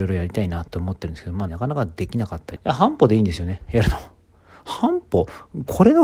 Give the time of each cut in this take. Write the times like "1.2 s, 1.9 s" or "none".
1.5 s, 2.6 s

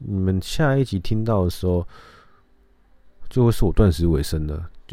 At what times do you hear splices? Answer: none

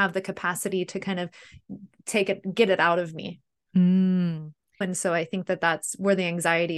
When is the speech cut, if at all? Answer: 4.8 s

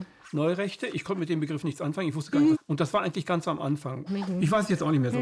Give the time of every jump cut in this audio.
2.5 s, 4.1 s

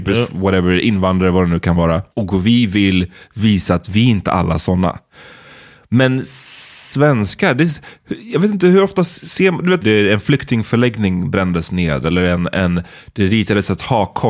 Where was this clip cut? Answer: 2.1 s, 9.8 s

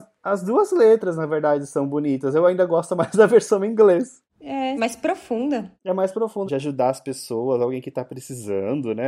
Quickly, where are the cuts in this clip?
4.8 s, 6.5 s

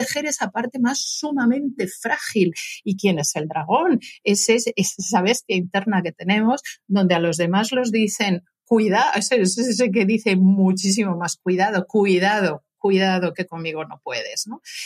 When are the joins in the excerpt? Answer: none

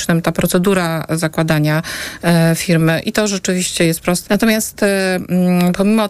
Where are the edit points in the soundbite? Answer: 4.3 s

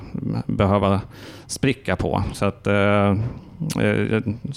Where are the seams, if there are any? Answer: none

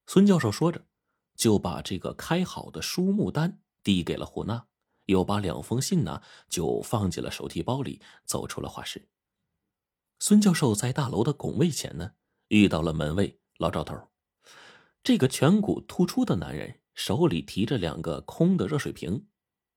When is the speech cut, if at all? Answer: none

